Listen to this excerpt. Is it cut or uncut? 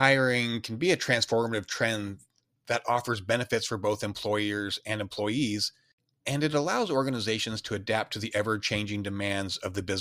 uncut